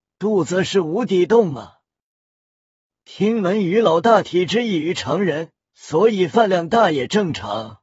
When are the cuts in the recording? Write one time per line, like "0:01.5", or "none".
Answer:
0:05.7